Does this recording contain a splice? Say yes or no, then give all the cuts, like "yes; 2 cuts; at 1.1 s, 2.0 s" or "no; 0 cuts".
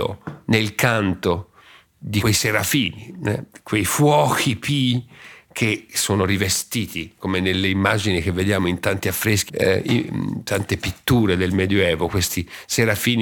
yes; 1 cut; at 9.5 s